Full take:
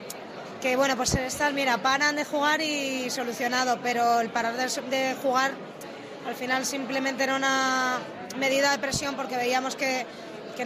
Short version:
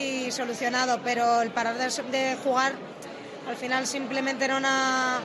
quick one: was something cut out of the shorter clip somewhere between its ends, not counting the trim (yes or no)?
no